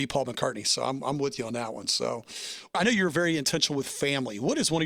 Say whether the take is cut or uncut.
uncut